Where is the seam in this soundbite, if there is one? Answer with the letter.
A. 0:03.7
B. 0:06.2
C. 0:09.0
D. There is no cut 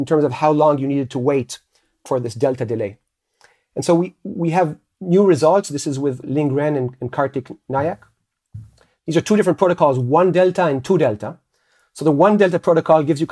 B